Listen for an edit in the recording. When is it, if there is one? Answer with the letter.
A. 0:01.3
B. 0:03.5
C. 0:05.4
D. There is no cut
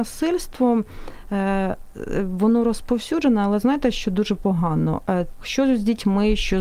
C